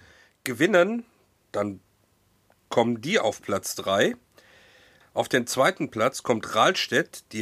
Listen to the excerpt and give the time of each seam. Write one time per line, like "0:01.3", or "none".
0:05.0

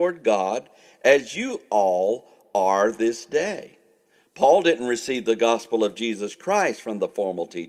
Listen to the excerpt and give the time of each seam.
none

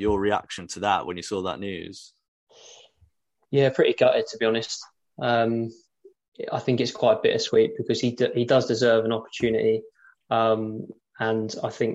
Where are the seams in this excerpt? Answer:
none

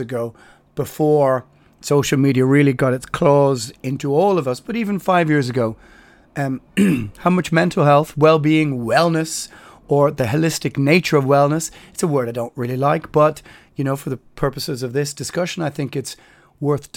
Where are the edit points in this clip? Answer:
none

